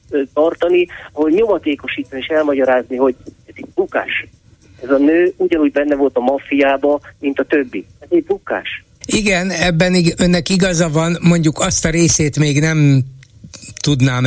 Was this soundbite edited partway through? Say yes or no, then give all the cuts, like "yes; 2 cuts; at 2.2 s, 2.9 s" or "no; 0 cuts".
yes; 1 cut; at 9.0 s